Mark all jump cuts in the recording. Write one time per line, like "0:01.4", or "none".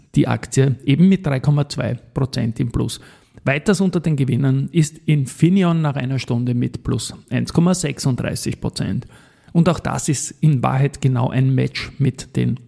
0:09.5